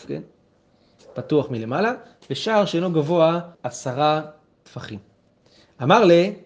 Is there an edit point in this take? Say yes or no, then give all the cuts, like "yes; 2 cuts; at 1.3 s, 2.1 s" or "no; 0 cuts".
yes; 1 cut; at 3.5 s